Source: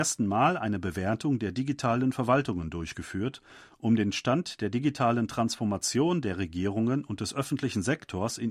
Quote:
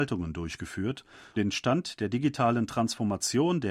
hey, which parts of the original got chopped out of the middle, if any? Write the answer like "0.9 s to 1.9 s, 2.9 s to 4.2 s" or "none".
3.7 s to 4.0 s